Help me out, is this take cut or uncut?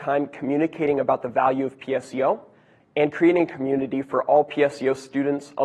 cut